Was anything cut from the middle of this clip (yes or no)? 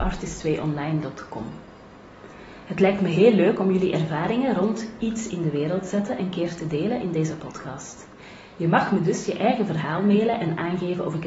no